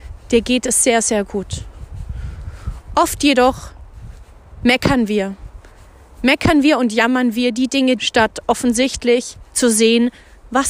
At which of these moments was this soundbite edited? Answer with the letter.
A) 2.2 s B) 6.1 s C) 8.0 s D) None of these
C